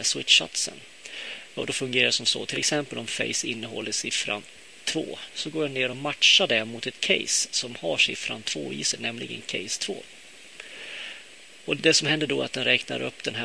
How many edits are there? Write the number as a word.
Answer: one